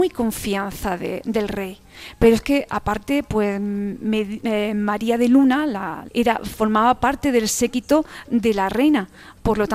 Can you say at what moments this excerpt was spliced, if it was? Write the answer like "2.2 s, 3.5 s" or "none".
2.7 s, 6.1 s